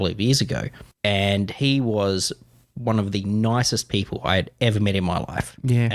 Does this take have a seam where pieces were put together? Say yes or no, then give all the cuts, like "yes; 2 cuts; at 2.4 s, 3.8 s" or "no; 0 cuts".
yes; 1 cut; at 0.9 s